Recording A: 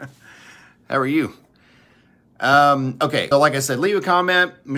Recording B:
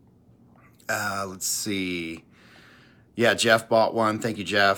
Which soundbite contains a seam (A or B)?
A